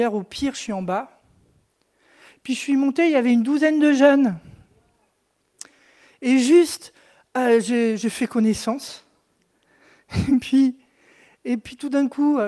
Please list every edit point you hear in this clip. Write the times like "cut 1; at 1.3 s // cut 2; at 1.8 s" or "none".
none